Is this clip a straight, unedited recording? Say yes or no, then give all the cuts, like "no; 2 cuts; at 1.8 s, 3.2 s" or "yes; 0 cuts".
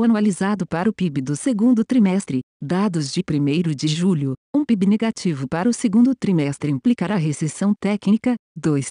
yes; 0 cuts